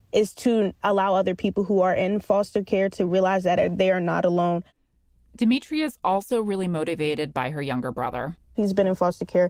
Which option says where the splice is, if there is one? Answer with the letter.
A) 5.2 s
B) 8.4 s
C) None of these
B